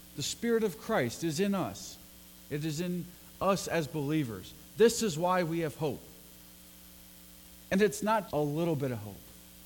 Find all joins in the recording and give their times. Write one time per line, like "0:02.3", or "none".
0:08.3